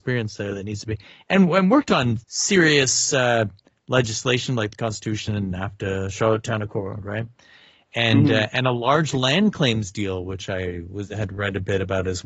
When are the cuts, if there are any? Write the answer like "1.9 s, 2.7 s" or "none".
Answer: 2.2 s